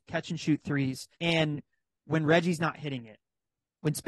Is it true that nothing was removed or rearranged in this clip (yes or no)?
no